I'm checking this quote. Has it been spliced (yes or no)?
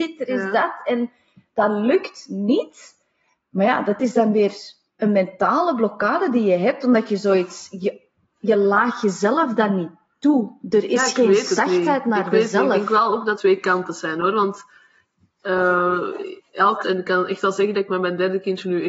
yes